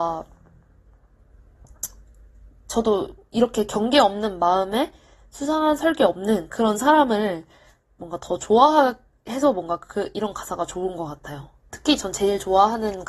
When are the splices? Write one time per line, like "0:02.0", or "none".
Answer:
0:11.7

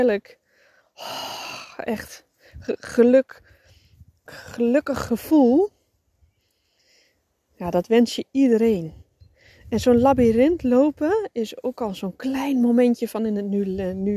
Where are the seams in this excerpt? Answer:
0:04.3

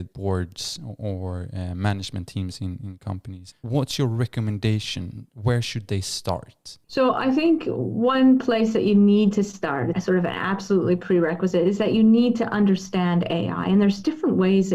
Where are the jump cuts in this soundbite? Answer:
0:06.8
0:09.9

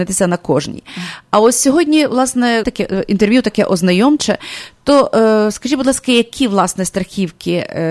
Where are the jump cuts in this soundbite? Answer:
0:02.6

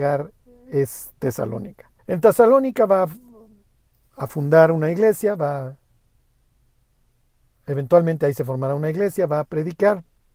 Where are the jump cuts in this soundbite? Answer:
0:02.0

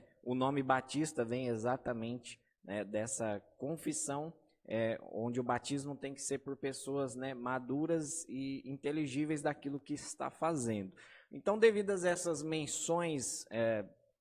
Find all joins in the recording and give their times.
none

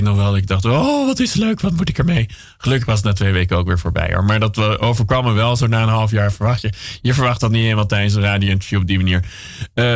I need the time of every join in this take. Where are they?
none

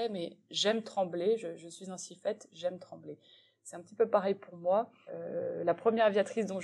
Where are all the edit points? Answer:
0:05.1

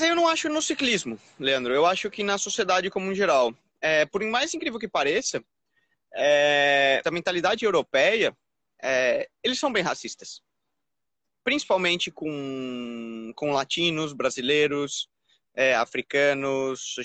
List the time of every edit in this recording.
0:07.0

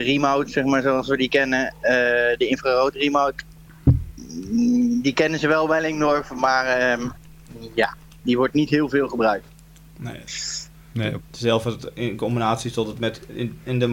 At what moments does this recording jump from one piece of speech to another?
0:11.2

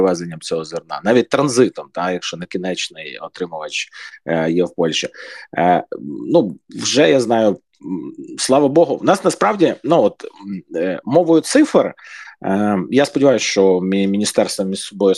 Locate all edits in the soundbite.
none

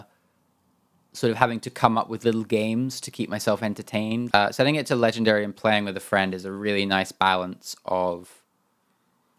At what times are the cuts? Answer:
0:04.3

